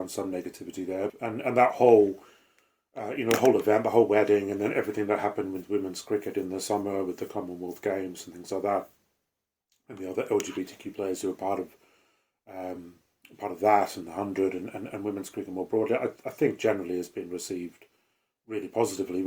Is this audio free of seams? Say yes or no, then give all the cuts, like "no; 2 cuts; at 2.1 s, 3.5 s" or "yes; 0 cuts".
no; 1 cut; at 1.1 s